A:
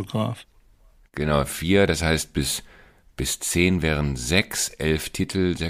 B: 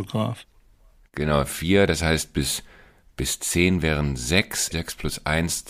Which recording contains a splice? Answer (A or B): B